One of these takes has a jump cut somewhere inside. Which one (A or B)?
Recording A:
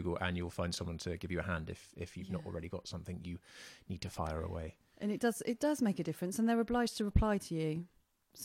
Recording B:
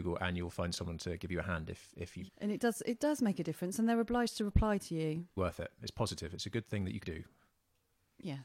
B